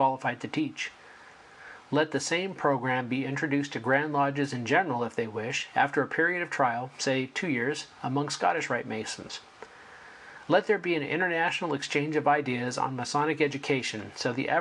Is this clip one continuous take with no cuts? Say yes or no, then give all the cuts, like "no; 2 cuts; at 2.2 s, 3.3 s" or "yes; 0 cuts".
yes; 0 cuts